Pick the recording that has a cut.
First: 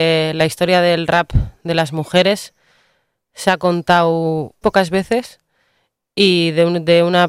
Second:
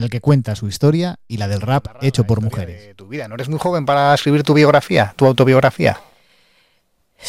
first; 1 cut; at 4.6 s

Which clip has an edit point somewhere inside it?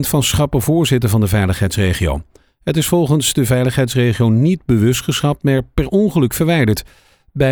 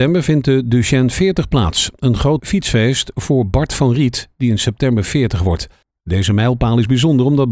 second; 1 cut; at 2.4 s

